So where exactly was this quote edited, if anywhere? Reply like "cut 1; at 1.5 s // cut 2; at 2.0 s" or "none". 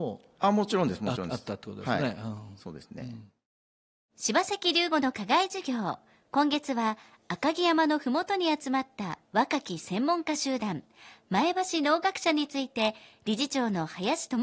none